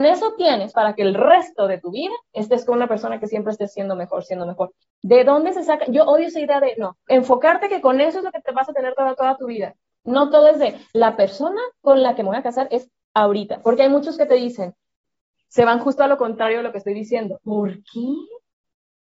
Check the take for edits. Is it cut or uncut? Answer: cut